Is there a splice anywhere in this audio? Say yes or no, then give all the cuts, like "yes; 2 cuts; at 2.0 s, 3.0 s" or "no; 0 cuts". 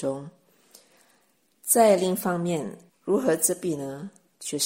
yes; 1 cut; at 2.9 s